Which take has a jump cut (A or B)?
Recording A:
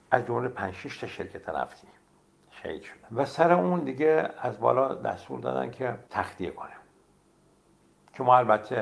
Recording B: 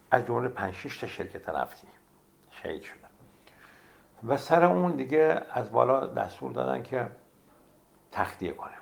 A